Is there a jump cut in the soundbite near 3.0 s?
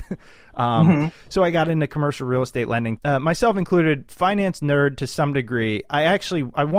yes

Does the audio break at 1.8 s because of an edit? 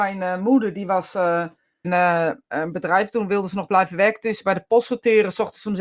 yes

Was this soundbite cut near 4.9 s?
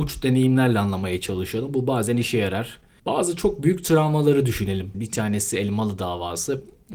yes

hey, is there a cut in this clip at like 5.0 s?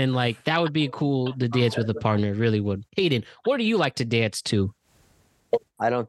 no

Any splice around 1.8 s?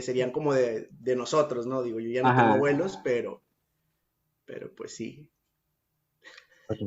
no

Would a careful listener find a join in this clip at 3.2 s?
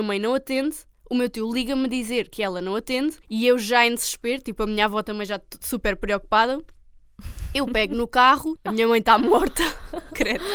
yes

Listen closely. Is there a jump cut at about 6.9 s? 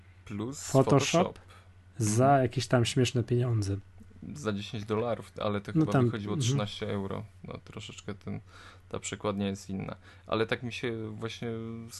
no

